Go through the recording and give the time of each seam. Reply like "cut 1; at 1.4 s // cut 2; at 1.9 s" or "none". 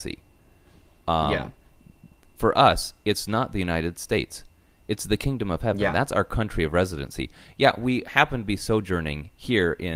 none